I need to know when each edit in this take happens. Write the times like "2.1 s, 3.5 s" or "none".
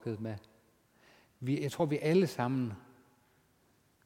none